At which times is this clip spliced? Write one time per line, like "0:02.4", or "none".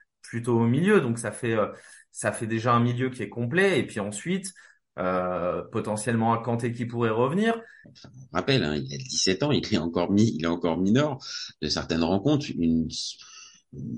0:07.8
0:11.5